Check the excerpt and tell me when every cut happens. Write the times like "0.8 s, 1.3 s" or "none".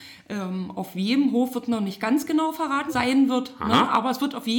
2.9 s